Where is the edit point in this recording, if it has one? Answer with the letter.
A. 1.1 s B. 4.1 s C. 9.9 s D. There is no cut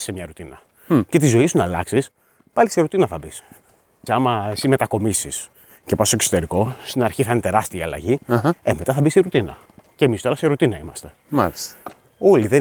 B